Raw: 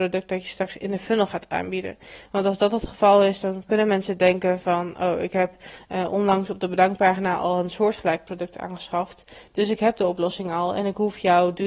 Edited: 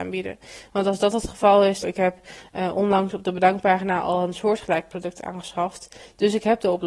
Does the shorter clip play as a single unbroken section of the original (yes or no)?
no